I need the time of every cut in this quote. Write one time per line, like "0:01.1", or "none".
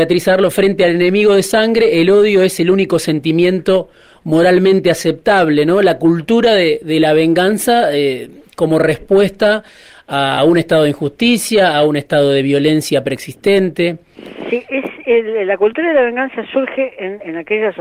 none